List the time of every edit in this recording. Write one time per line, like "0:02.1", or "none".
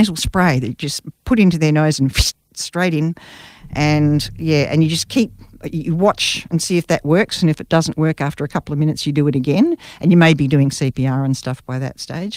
none